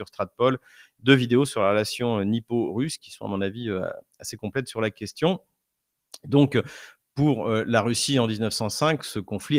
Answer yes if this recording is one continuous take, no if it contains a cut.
no